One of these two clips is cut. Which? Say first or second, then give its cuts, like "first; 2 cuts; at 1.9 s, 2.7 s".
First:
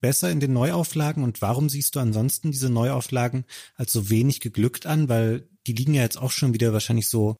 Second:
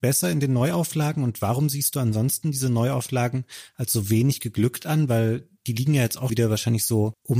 second; 1 cut; at 6.3 s